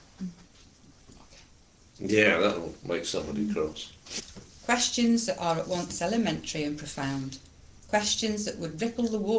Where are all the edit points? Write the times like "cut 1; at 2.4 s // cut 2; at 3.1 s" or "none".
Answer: cut 1; at 4.2 s